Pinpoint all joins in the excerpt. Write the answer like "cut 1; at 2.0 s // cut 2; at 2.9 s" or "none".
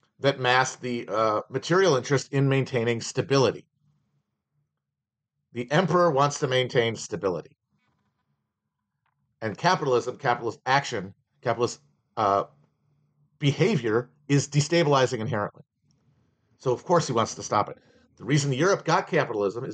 none